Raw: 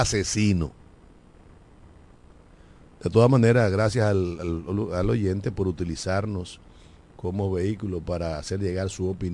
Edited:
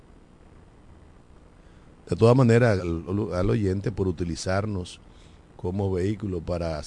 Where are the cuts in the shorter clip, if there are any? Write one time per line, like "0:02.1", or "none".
0:02.8